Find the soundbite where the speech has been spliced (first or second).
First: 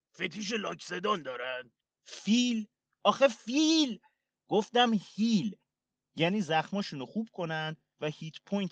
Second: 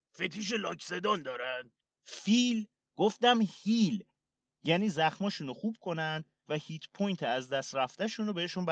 second